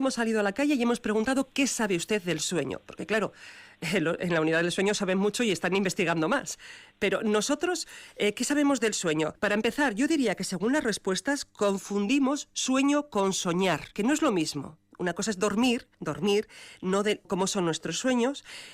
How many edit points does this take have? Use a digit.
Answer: 2